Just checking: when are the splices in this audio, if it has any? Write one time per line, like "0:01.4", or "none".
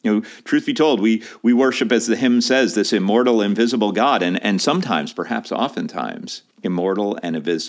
0:06.5